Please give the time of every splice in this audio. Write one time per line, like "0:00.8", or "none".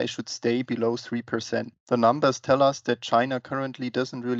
none

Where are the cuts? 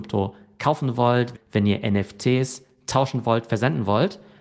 0:01.3

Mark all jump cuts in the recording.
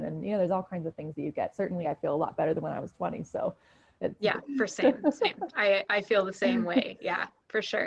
0:01.8
0:05.5

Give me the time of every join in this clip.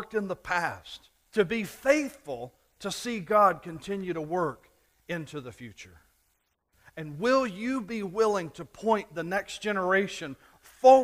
0:01.3

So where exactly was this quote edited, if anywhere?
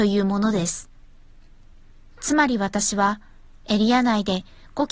none

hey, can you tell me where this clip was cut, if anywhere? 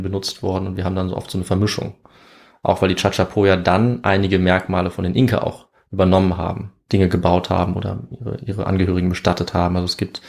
0:06.9

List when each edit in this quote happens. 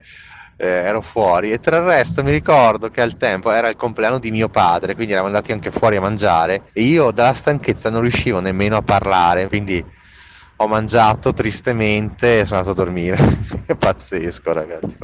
0:06.7
0:09.5

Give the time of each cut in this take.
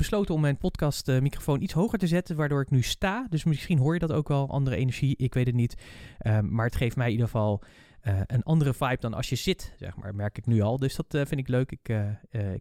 none

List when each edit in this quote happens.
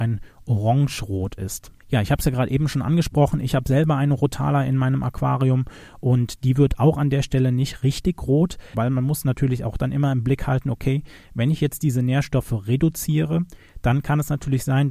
0:08.7

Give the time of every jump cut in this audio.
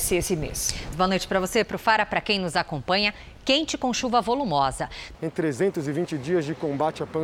0:00.9
0:05.1

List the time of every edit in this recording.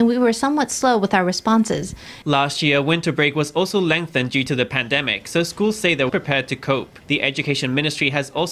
0:02.2
0:06.1

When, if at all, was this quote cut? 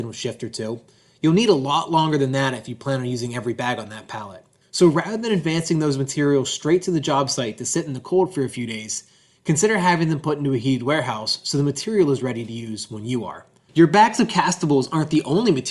0:04.6
0:13.7

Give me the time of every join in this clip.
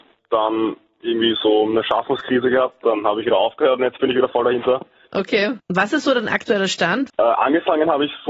0:05.6
0:07.1

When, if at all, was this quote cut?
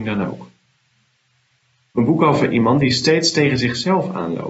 none

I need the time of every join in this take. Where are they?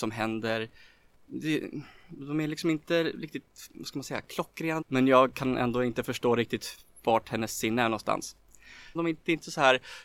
0:04.8
0:09.0

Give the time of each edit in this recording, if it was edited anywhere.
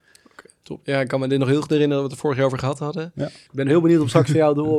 0:03.5

